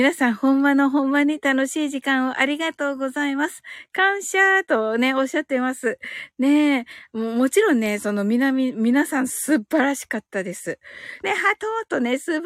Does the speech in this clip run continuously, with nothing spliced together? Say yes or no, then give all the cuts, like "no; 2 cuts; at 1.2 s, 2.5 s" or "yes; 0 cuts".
no; 1 cut; at 11.2 s